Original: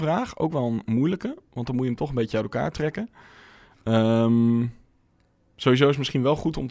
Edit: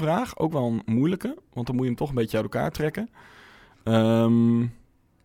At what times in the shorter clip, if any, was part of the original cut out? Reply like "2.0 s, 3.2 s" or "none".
none